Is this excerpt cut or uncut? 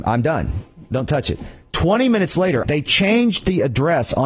cut